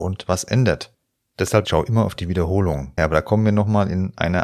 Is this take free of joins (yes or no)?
no